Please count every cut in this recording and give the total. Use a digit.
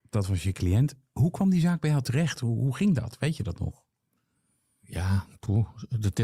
0